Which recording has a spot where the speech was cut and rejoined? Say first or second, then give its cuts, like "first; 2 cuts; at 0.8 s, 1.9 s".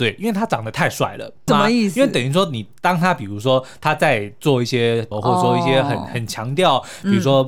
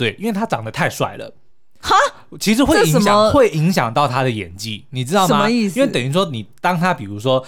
first; 2 cuts; at 1.5 s, 5.1 s